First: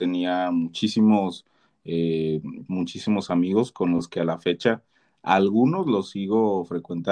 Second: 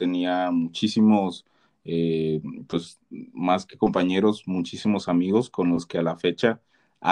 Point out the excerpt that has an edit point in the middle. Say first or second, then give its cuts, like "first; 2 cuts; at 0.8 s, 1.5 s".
first; 1 cut; at 2.7 s